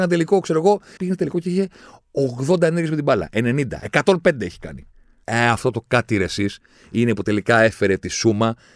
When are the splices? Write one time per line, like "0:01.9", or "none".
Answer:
0:01.0
0:05.2